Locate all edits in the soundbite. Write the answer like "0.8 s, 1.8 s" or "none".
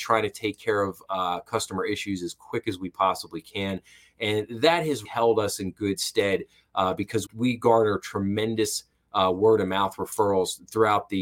5.0 s, 7.3 s